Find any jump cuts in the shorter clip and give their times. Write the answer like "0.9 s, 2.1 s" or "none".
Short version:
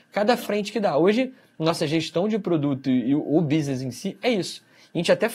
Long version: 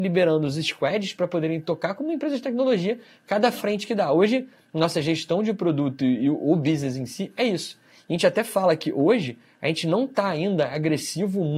none